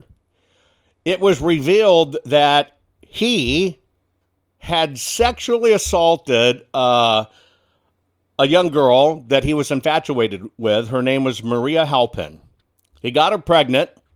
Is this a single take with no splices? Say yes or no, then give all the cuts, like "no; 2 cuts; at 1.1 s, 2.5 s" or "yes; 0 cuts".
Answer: yes; 0 cuts